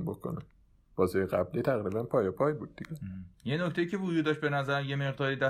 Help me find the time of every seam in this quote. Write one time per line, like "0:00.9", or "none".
none

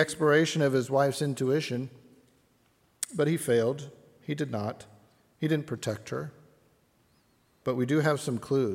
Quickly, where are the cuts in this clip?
0:07.6

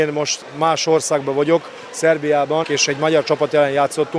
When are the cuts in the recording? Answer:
0:02.6

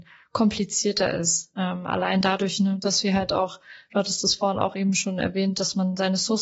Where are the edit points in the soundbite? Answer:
none

